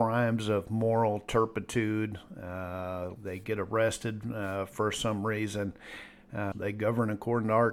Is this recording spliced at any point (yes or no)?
yes